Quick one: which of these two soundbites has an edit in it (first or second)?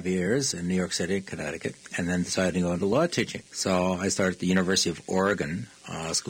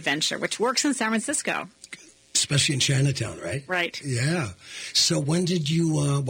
first